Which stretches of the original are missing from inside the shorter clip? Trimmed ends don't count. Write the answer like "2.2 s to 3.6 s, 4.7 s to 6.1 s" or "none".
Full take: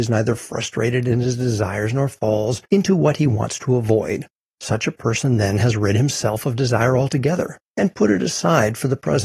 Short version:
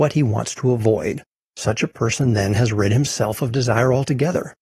none